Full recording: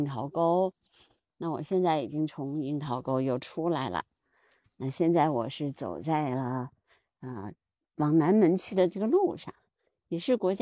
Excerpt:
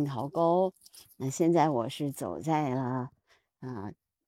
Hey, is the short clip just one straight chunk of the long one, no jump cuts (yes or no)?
no